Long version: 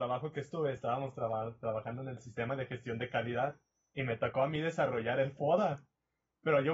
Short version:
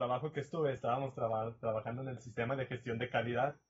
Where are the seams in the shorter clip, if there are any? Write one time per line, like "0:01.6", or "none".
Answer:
none